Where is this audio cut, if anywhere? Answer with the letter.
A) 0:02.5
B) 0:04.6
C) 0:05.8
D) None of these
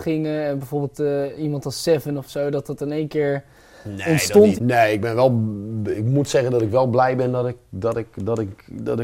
B